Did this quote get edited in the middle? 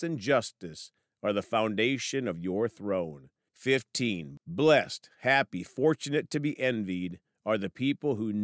yes; 1 cut; at 3.5 s

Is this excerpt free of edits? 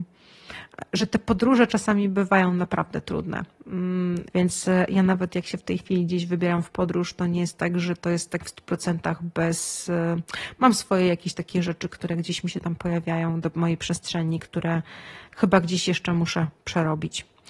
no; 1 cut; at 4.3 s

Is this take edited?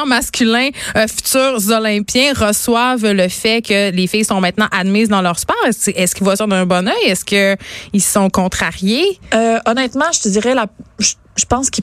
no; 0 cuts

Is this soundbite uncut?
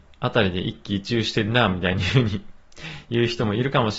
yes; 0 cuts

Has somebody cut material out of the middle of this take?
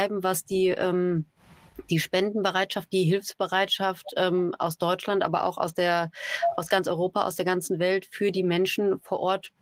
no; 0 cuts

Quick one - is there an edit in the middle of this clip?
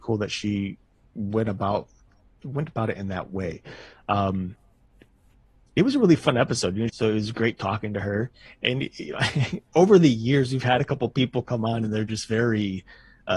yes; 1 cut; at 6.9 s

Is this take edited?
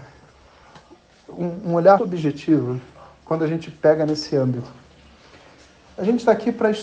yes; 1 cut; at 2.0 s

